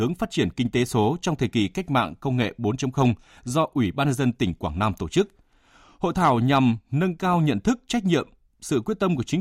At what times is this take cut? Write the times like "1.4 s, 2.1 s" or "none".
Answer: none